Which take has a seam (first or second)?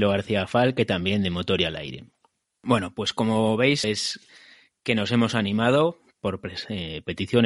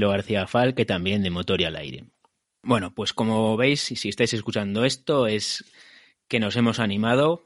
first